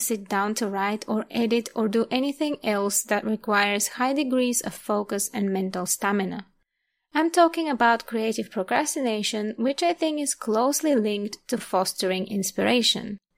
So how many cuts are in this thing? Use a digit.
0